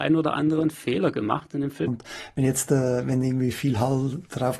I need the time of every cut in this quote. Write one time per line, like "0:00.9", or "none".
0:01.9